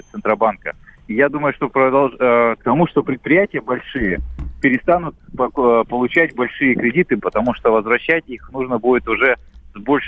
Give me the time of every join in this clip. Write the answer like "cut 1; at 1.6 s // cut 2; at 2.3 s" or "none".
cut 1; at 2.6 s // cut 2; at 7.2 s